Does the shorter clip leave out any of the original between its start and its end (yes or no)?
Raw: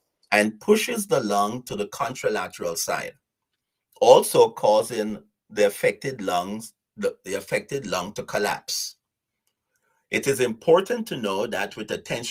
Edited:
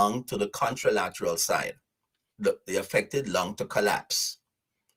yes